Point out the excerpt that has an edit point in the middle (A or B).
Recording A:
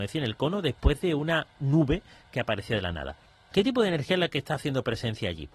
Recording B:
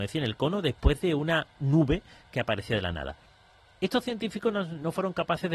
A